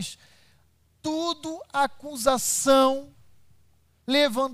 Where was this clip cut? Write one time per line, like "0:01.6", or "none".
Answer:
none